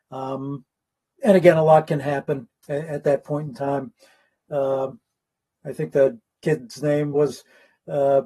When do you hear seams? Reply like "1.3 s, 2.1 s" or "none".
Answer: 7.1 s